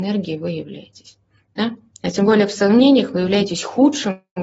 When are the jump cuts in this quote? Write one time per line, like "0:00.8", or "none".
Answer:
none